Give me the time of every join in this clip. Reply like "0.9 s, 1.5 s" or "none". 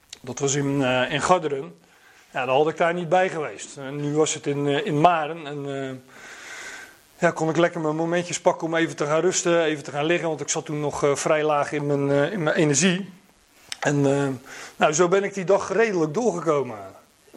15.7 s